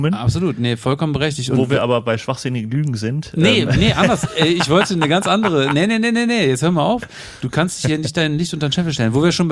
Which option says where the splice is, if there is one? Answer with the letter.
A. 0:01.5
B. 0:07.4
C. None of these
C